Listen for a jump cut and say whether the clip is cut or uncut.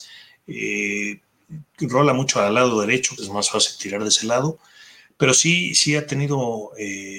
cut